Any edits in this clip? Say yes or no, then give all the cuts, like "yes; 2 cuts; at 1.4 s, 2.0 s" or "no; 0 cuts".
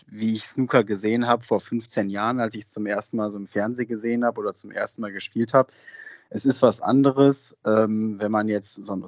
no; 0 cuts